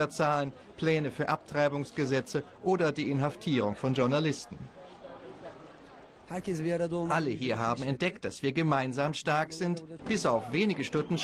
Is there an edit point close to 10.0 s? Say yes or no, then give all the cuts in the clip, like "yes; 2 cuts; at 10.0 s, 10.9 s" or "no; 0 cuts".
yes; 1 cut; at 10.0 s